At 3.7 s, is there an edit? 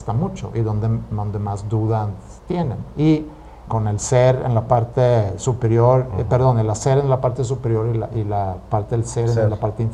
yes; 1 cut; at 3.7 s

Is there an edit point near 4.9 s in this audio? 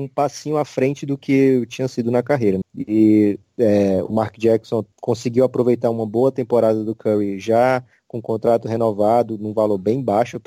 yes; 2 cuts; at 2.6 s, 4.9 s

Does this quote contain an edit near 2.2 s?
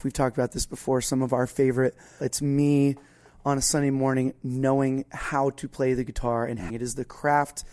yes; 2 cuts; at 2.2 s, 6.7 s

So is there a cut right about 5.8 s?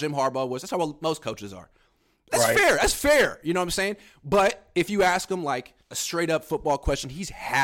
yes; 1 cut; at 5.8 s

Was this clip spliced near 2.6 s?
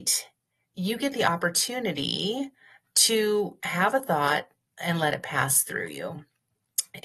no; 0 cuts

